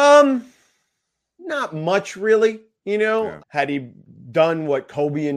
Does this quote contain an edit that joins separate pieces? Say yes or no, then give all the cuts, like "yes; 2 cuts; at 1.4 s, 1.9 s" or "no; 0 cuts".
yes; 2 cuts; at 1.4 s, 3.4 s